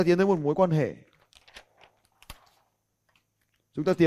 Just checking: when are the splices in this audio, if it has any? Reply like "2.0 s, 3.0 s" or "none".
none